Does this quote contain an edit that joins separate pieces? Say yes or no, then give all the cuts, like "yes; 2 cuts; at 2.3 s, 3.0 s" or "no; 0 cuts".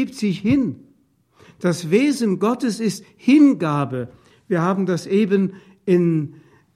no; 0 cuts